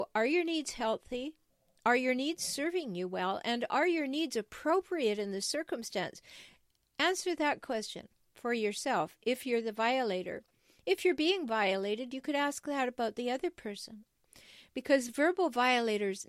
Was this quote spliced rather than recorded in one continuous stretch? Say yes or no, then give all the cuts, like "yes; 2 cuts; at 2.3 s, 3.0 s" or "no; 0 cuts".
no; 0 cuts